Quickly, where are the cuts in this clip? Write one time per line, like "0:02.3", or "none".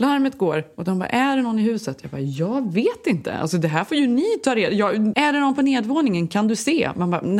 0:05.1